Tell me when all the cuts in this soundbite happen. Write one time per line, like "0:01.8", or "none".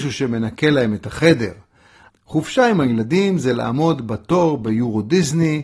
0:02.1